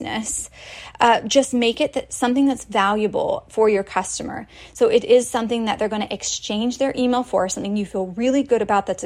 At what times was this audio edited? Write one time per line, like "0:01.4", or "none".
none